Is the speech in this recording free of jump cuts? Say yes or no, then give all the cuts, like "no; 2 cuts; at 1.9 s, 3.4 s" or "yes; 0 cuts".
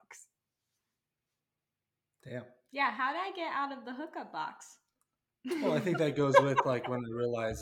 yes; 0 cuts